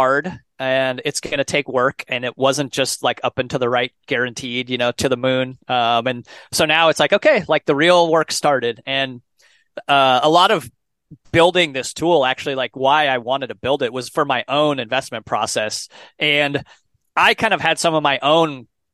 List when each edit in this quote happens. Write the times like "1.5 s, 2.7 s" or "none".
none